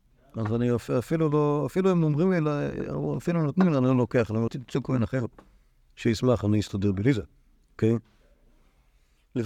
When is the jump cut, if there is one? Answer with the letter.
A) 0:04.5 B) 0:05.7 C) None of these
A